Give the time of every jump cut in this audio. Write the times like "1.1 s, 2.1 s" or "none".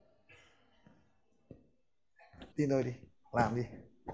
2.5 s